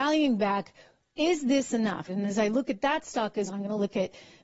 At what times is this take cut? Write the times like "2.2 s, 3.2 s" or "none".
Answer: 2.1 s, 3.5 s

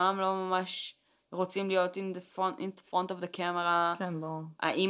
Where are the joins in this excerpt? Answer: none

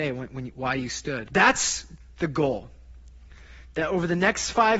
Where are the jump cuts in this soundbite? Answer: 1.3 s

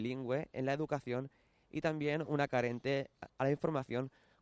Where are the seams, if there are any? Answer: 3.3 s

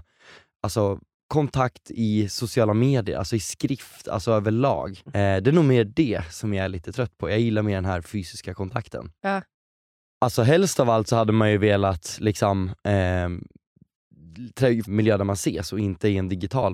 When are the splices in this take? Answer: 5.1 s, 10.1 s, 14.8 s

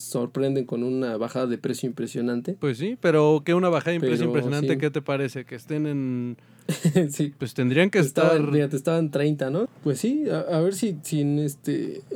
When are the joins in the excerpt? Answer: 9.6 s

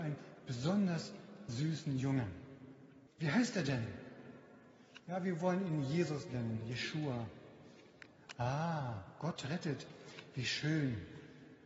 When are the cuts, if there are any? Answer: 3.1 s

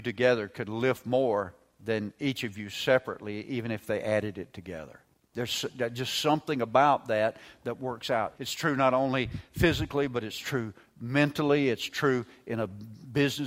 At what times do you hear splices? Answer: 8.4 s

